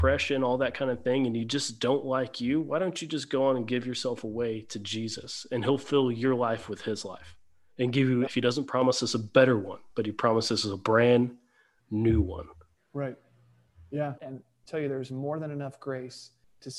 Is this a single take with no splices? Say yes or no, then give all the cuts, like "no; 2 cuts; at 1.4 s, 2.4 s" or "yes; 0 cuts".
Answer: no; 2 cuts; at 8.3 s, 14.2 s